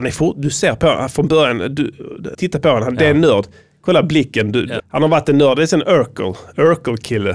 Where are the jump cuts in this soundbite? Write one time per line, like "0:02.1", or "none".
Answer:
0:02.3
0:04.8